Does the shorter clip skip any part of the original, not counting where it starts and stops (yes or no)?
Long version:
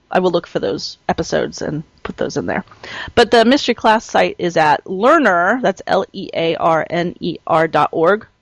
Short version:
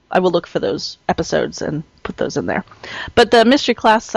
no